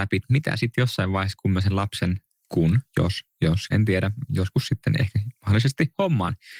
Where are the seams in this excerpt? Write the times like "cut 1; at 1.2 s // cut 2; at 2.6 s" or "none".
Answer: cut 1; at 3.7 s

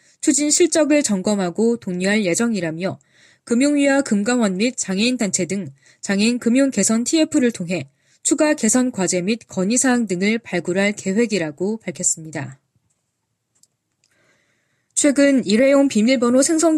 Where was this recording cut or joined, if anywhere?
none

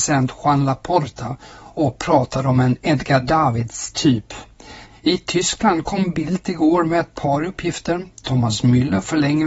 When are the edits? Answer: cut 1; at 4.9 s

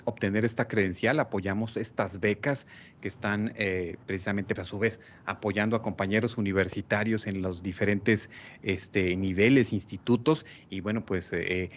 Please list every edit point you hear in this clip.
cut 1; at 4.6 s

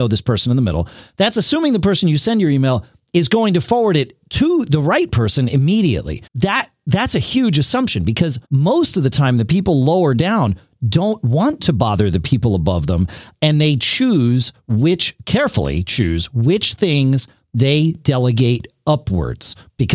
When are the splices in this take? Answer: cut 1; at 6.3 s // cut 2; at 8.4 s

